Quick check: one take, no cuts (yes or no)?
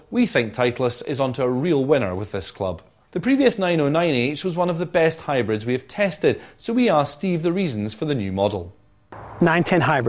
no